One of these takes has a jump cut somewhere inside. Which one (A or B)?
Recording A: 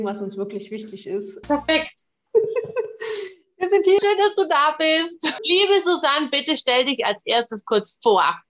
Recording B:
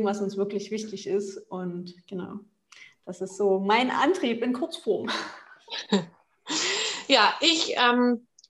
A